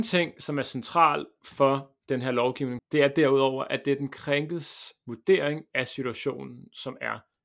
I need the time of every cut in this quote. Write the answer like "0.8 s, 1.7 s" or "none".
2.8 s